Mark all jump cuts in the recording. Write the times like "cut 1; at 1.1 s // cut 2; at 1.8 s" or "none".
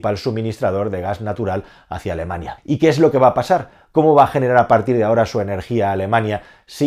cut 1; at 2.6 s